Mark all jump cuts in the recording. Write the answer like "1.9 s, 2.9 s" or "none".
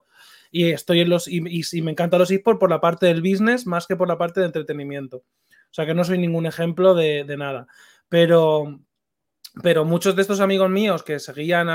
none